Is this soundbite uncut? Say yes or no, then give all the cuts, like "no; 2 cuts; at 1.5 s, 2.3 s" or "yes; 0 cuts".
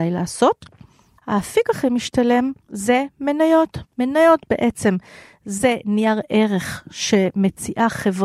no; 2 cuts; at 1.2 s, 2.6 s